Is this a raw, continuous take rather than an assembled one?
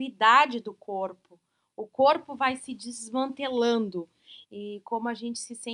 no; 1 cut; at 4.4 s

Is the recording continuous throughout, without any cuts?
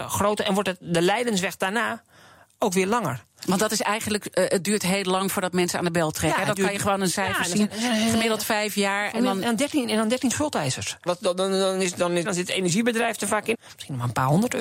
no; 3 cuts; at 11.1 s, 12.2 s, 13.5 s

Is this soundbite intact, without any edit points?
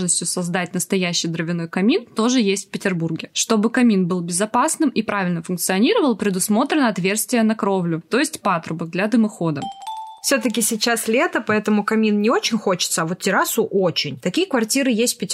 yes; 0 cuts

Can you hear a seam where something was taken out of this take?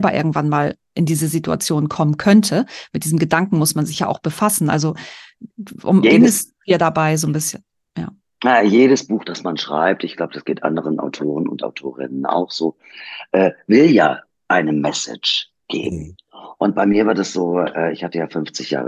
yes; 1 cut; at 6.0 s

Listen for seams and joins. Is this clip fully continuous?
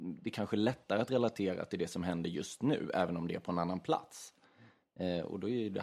yes; 0 cuts

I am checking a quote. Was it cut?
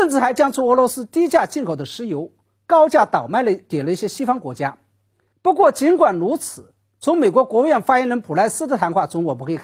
yes; 1 cut; at 5.3 s

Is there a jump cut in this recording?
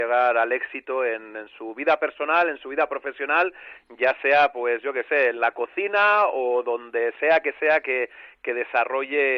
no; 0 cuts

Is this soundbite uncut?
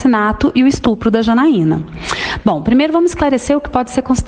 yes; 0 cuts

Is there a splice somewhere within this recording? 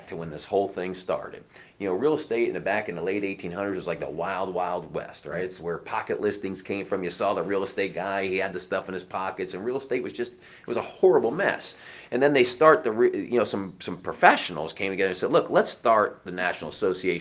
no; 0 cuts

